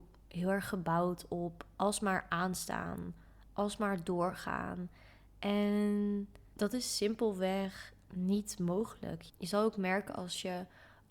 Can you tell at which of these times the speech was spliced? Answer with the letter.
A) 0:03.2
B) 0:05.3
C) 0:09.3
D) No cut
D